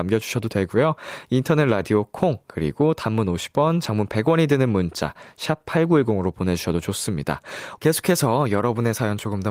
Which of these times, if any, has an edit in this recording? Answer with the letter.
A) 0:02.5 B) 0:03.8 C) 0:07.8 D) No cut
C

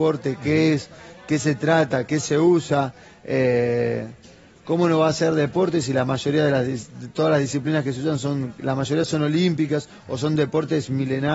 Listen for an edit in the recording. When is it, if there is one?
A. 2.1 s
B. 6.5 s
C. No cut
C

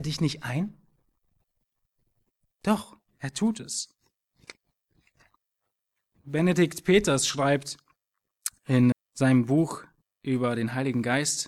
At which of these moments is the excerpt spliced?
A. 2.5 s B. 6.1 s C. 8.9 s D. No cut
C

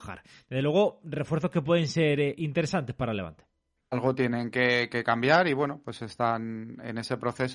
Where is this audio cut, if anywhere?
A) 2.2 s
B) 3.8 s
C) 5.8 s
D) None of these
B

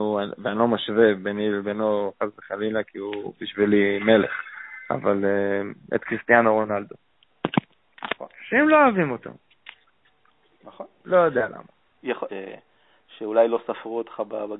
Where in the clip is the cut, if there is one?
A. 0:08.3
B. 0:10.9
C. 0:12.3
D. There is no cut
C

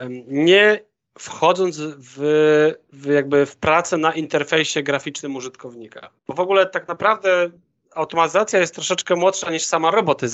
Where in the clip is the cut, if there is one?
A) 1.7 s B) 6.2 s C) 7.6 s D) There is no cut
D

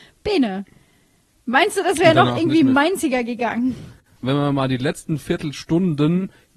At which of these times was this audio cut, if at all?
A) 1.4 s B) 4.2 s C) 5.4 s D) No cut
B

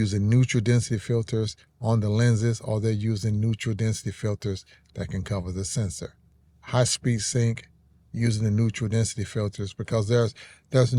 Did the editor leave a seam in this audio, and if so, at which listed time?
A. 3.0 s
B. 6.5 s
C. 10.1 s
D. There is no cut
B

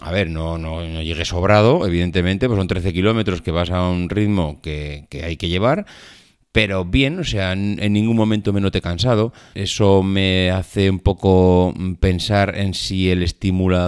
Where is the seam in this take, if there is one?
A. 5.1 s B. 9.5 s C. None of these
B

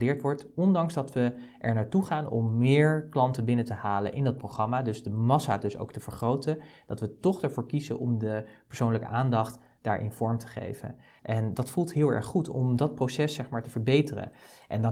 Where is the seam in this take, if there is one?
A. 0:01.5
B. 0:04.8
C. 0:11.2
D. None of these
C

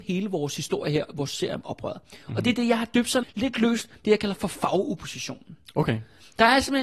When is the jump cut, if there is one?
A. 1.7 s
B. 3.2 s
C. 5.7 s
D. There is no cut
B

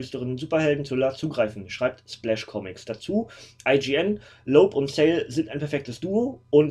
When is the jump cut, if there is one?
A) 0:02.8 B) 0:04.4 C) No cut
C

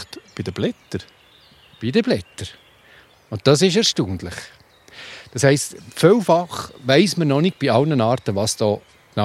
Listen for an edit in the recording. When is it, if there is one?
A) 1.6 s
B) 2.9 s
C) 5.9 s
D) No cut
D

